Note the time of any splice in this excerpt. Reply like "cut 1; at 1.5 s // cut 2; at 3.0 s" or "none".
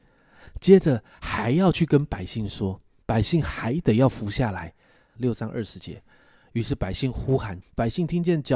cut 1; at 3.0 s // cut 2; at 5.2 s // cut 3; at 7.6 s